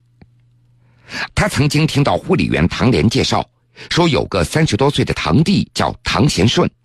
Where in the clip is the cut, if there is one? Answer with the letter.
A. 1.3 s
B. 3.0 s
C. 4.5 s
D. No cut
A